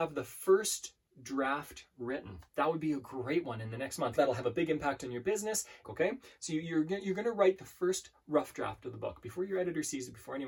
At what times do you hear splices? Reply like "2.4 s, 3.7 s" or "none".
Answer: 2.5 s, 4.2 s, 5.8 s